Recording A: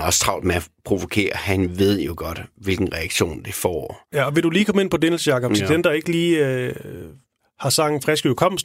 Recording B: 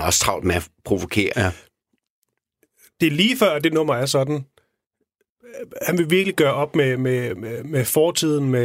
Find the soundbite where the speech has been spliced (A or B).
B